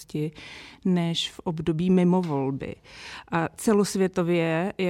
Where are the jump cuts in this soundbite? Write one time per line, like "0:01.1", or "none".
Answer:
none